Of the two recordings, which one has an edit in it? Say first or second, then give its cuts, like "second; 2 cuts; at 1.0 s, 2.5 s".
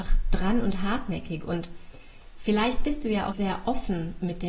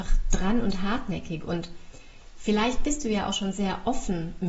first; 1 cut; at 3.3 s